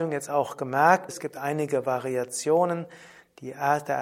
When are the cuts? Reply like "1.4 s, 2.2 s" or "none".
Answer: 1.1 s